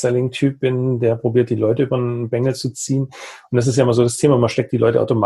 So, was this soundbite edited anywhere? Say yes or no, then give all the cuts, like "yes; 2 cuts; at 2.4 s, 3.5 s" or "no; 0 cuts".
no; 0 cuts